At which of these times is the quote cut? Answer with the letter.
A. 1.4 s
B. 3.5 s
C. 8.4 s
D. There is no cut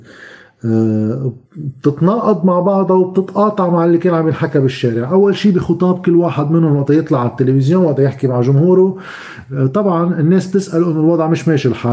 A